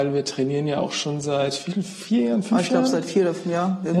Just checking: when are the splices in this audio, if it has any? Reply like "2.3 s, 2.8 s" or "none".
none